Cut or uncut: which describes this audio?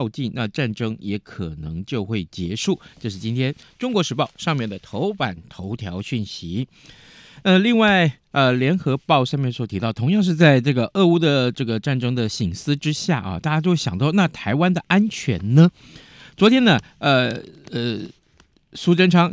uncut